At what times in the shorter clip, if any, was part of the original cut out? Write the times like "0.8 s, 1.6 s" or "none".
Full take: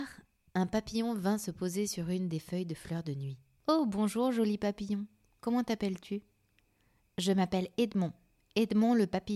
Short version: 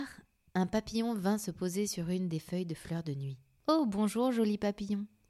none